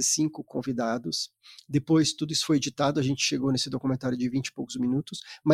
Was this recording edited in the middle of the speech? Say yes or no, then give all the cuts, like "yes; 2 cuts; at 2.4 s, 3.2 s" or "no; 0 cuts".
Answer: no; 0 cuts